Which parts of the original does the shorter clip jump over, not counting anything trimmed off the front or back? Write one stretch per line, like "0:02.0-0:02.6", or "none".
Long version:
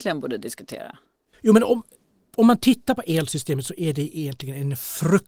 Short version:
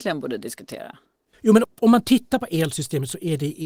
0:01.6-0:02.2